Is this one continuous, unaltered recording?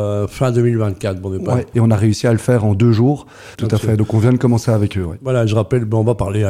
no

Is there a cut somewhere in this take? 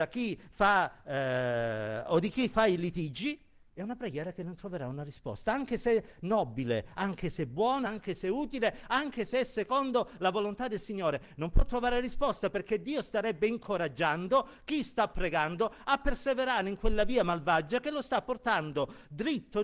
yes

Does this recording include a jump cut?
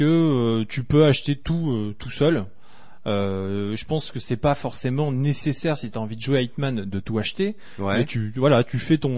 no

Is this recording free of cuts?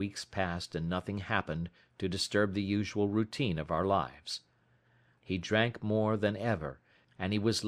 no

